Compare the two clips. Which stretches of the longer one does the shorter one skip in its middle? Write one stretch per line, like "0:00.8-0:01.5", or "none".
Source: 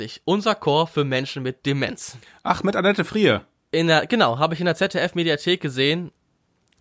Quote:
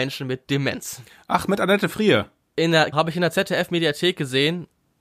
0:04.1-0:04.4